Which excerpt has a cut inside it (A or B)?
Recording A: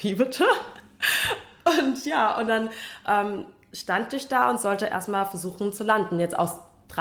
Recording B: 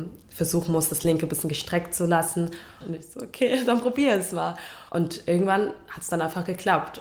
B